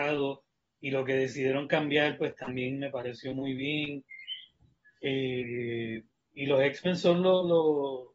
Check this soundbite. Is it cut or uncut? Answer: uncut